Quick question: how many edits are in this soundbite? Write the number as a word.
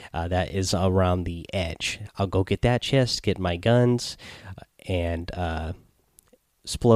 zero